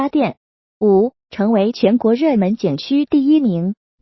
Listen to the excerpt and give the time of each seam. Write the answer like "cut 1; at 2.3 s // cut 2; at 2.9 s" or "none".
cut 1; at 1.2 s